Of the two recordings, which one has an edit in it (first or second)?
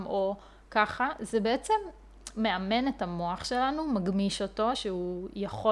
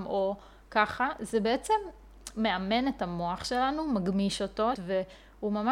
second